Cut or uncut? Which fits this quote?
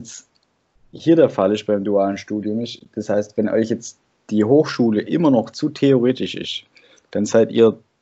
uncut